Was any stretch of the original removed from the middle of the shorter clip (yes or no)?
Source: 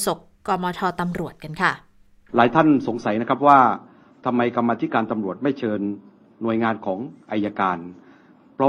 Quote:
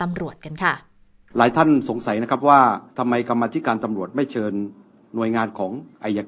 yes